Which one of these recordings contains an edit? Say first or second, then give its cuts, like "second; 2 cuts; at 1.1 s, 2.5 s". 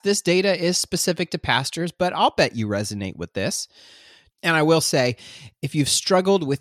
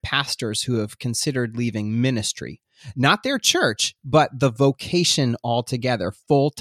first; 1 cut; at 4.3 s